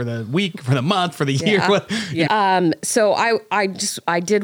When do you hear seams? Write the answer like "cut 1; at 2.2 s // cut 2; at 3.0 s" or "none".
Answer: cut 1; at 2.2 s